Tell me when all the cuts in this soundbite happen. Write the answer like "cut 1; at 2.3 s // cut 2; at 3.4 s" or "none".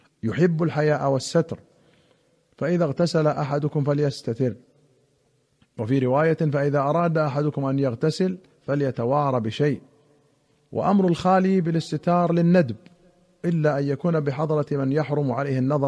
none